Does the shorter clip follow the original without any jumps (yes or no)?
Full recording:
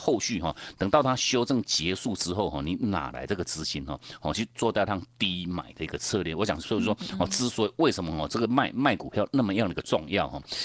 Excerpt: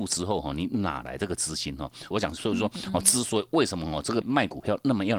no